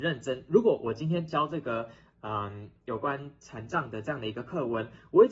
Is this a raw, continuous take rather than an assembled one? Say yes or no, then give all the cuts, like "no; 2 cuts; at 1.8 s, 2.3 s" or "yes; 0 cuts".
yes; 0 cuts